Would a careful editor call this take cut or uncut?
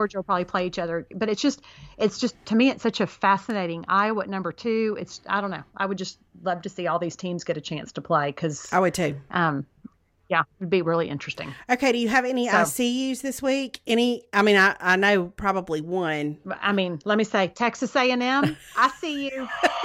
uncut